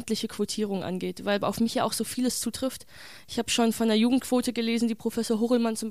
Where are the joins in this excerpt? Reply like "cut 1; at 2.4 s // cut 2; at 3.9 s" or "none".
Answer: none